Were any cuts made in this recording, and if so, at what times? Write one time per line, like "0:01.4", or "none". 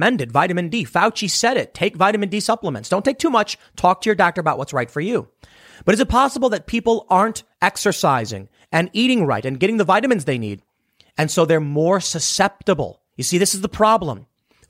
0:13.1